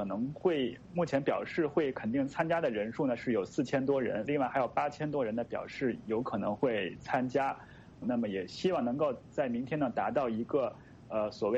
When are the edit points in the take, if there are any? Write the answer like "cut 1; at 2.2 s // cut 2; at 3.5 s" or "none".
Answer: cut 1; at 4.3 s // cut 2; at 8.0 s